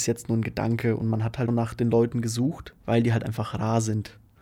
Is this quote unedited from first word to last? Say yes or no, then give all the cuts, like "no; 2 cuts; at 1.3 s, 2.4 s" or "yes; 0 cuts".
no; 2 cuts; at 1.5 s, 2.8 s